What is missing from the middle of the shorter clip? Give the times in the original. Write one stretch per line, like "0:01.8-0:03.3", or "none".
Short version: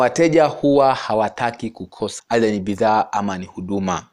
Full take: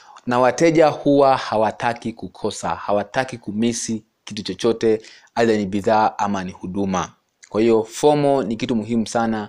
0:02.6-0:05.3